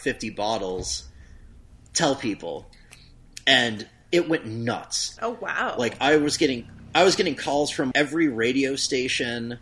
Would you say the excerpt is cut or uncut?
cut